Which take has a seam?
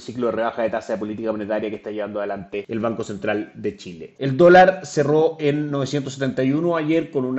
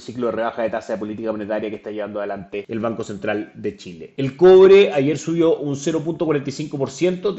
first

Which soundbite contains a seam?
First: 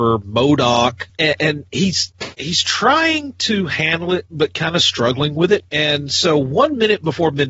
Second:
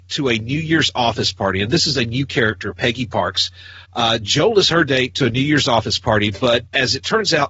first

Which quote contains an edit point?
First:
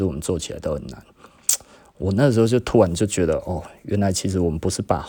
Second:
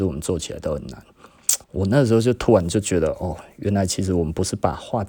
second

